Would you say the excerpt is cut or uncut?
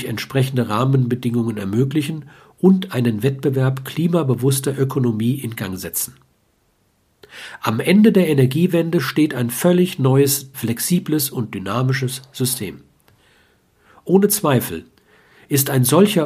cut